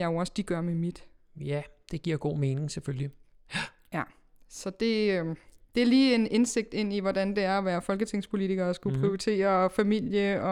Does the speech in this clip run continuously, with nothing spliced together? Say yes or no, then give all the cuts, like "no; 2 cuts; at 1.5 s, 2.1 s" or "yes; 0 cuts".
yes; 0 cuts